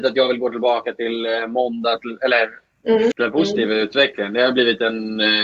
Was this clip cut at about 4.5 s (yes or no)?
no